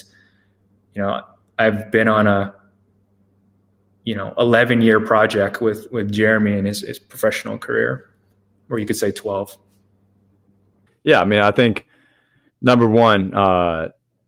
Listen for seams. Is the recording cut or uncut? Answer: cut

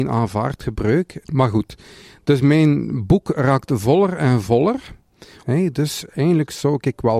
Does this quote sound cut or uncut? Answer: cut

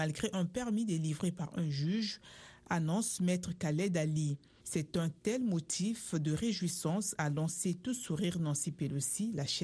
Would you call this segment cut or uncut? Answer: cut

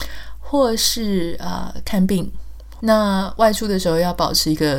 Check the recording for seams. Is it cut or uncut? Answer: cut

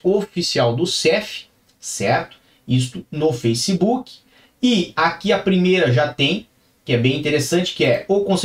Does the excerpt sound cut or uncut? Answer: uncut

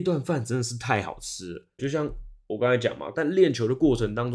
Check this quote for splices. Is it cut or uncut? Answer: cut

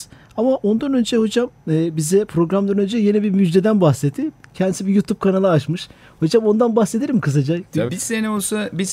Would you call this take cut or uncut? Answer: cut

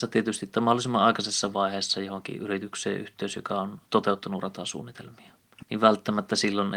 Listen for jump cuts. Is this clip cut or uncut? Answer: cut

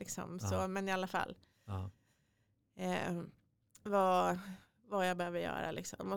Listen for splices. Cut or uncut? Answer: uncut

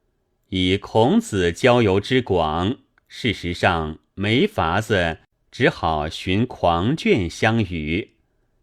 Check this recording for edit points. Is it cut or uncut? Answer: uncut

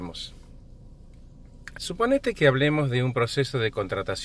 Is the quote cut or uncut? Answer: cut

